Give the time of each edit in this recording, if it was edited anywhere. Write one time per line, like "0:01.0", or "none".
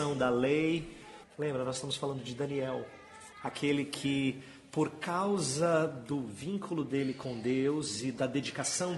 0:01.2
0:03.3